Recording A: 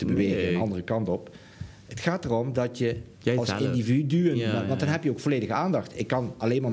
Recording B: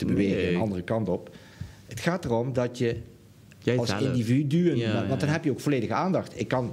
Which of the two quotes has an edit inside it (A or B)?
A